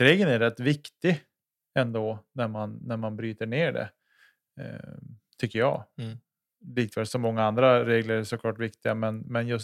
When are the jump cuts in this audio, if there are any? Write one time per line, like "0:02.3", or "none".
none

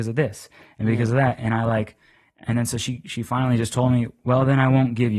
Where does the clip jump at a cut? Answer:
none

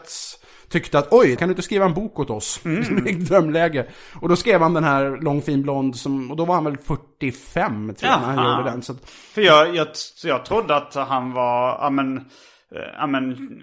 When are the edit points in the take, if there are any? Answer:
0:01.4

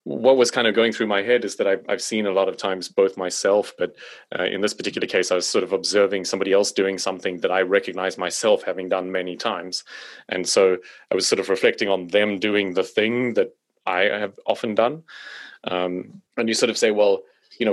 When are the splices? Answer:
0:16.3

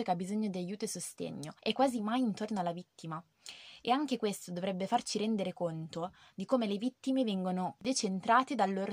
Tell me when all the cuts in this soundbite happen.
none

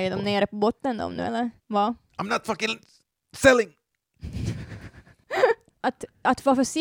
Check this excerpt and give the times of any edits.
0:01.6
0:05.8

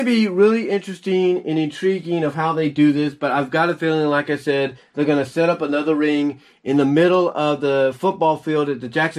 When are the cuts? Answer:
none

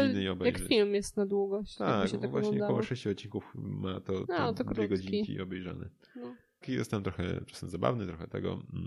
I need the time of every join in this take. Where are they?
0:04.2
0:06.6

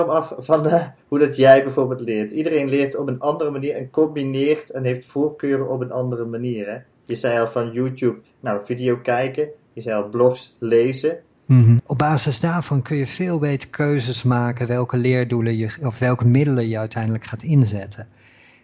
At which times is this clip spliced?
0:11.8

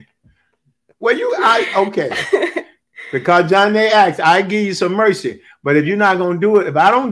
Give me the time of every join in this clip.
none

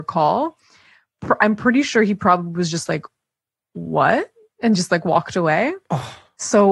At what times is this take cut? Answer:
none

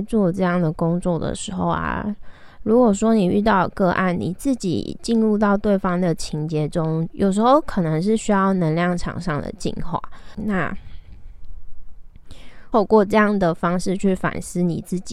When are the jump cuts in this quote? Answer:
0:07.1
0:10.4
0:12.7

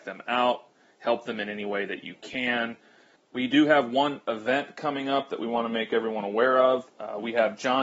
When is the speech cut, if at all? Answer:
0:06.9

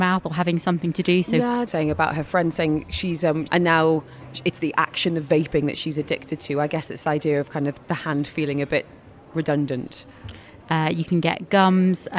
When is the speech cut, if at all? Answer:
0:01.7
0:03.5
0:10.6

